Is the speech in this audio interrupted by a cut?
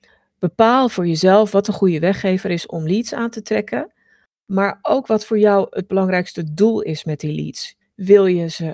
yes; 1 cut; at 7.8 s

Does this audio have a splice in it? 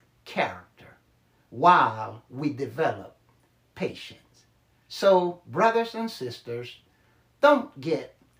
no; 0 cuts

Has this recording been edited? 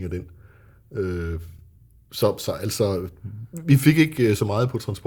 no; 0 cuts

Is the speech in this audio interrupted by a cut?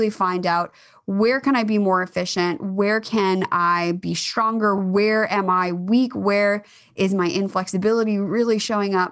no; 0 cuts

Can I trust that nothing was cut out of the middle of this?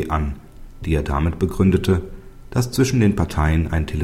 yes; 0 cuts

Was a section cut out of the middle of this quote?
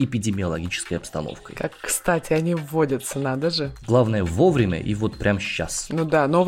no; 0 cuts

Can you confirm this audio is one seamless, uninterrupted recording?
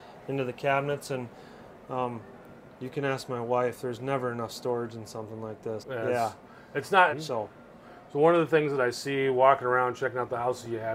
no; 2 cuts; at 5.8 s, 7.1 s

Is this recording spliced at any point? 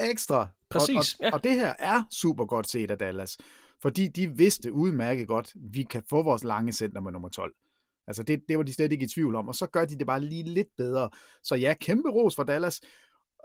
no; 0 cuts

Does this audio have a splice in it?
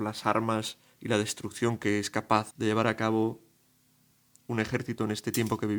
yes; 1 cut; at 2.5 s

